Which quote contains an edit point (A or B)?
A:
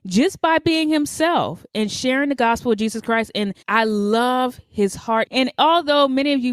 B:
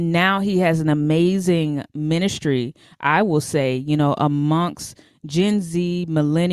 A